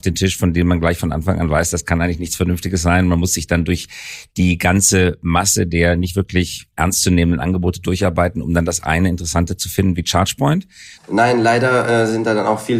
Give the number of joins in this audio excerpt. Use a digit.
1